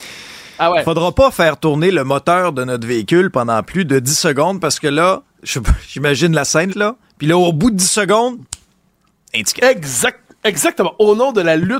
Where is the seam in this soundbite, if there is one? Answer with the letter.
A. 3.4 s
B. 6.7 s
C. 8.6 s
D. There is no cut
B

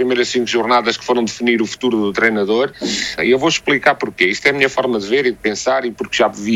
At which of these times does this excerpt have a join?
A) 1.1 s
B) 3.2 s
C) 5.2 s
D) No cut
B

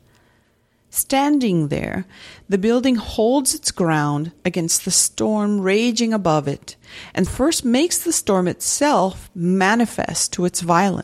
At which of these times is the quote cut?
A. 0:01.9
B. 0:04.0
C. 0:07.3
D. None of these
C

